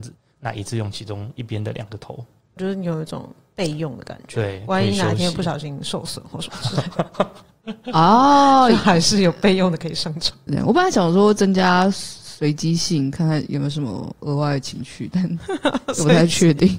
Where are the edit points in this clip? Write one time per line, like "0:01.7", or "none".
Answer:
0:02.6
0:10.5

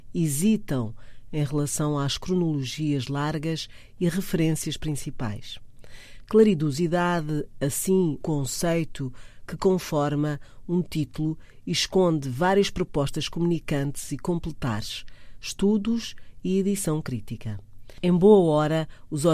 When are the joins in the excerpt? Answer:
0:08.2

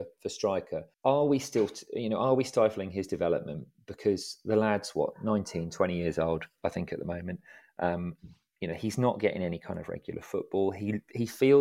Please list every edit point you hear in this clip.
0:00.9

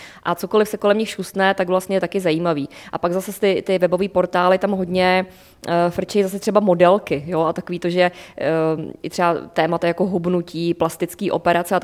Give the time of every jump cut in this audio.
none

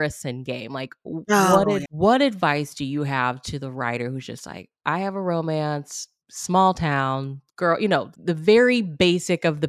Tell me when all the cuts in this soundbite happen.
0:01.9

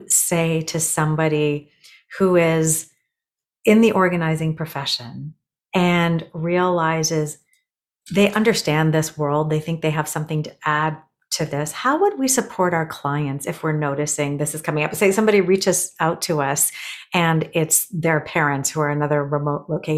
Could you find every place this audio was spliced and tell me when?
none

